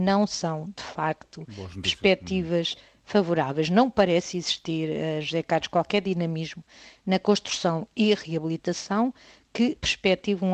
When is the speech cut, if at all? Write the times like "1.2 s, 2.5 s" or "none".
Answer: none